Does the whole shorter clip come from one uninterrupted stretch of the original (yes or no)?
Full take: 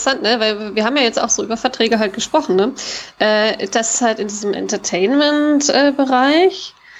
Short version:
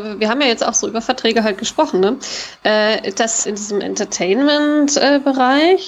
no